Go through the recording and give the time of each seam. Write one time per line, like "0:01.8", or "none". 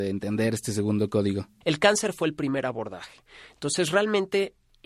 0:01.6